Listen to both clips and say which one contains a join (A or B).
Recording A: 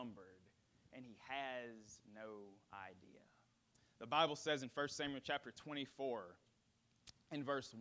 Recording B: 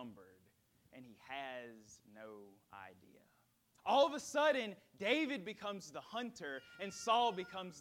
B